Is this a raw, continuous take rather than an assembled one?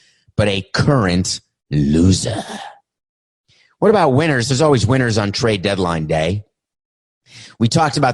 yes; 0 cuts

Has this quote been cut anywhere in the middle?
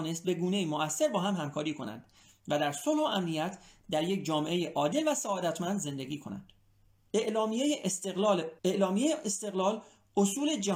yes; 2 cuts; at 7.1 s, 8.6 s

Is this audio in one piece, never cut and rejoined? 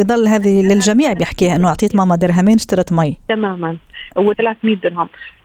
no; 1 cut; at 4.3 s

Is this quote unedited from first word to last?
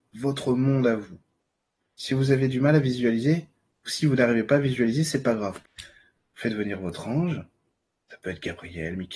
no; 1 cut; at 5.6 s

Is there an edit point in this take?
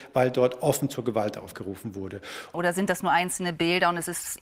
yes; 1 cut; at 2.5 s

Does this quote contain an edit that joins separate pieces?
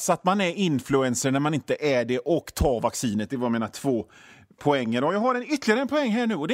no; 0 cuts

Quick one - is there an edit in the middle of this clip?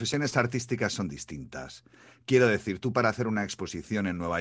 no; 0 cuts

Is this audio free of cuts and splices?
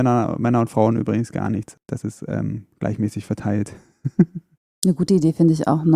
yes; 0 cuts

